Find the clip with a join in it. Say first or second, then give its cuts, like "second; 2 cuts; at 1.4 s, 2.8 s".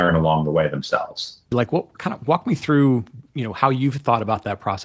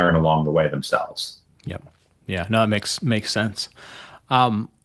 first; 1 cut; at 1.5 s